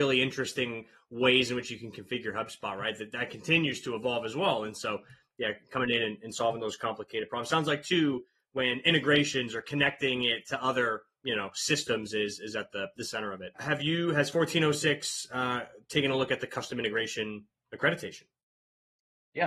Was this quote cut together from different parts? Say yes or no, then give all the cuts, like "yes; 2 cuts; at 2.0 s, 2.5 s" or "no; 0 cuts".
yes; 1 cut; at 13.6 s